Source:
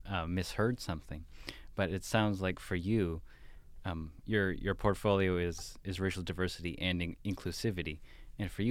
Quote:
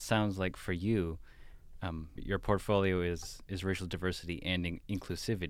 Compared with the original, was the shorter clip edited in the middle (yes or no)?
yes